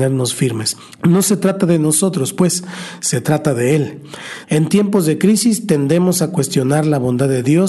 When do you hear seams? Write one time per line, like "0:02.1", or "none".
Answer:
0:00.9
0:04.4